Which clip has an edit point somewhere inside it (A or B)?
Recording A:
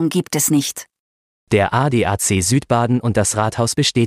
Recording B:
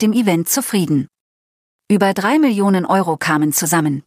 A